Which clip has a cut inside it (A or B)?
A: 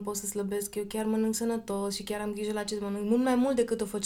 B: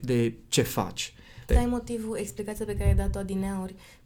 B